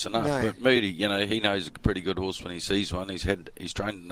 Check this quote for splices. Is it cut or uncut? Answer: uncut